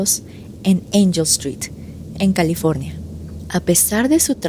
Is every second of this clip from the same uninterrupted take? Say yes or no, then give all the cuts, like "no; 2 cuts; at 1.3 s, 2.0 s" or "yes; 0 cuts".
no; 2 cuts; at 2.1 s, 3.5 s